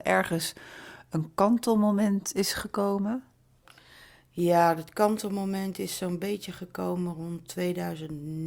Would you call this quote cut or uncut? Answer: uncut